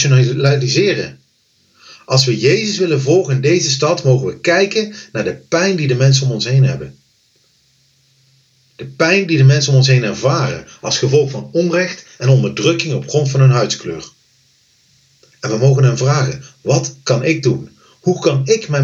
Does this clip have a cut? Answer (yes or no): no